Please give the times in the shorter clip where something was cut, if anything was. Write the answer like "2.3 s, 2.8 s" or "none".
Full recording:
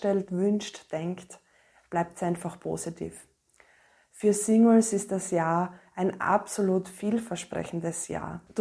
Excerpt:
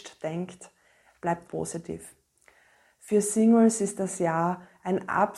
1.5 s